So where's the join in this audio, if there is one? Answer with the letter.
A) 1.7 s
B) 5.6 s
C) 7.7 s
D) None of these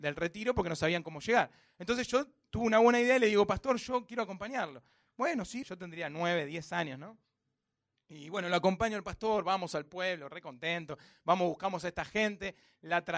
B